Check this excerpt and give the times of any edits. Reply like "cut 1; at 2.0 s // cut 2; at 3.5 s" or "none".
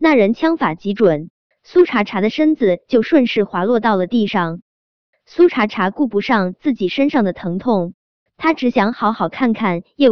cut 1; at 1.5 s